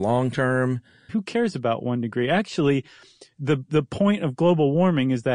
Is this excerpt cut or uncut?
cut